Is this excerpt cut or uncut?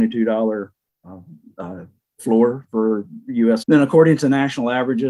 cut